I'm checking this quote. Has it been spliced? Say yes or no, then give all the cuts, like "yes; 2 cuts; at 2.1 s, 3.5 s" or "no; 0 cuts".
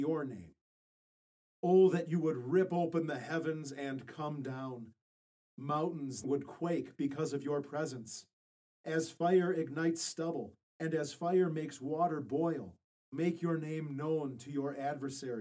yes; 1 cut; at 6.2 s